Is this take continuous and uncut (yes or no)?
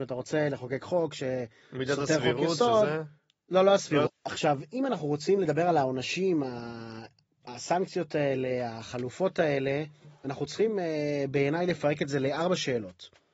no